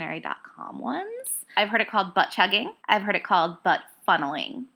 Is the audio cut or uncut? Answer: cut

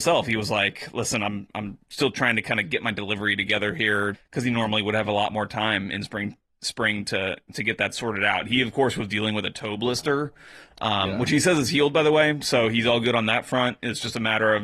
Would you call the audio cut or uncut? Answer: cut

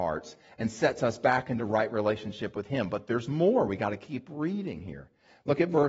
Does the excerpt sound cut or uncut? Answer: uncut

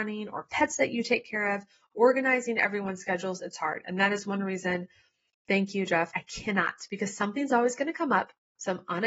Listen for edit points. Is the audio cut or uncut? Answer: cut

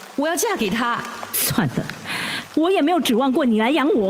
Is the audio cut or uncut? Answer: cut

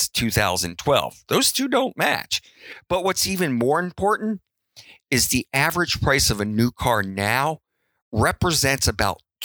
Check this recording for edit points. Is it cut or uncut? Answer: uncut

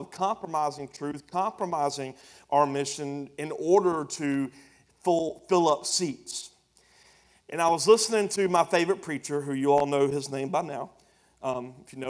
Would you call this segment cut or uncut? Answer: uncut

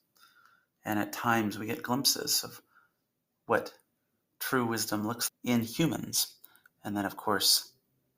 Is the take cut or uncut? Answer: cut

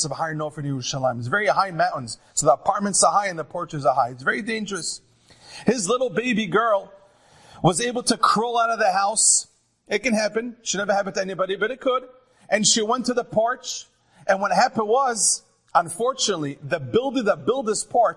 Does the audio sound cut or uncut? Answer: uncut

